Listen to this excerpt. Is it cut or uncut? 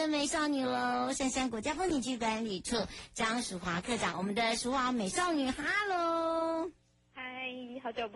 uncut